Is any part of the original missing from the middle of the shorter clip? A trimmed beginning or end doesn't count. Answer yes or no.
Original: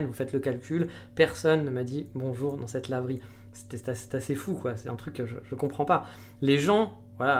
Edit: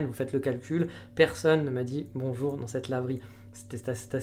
no